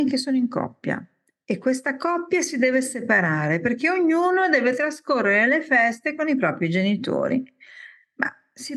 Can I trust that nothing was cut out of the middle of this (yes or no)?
yes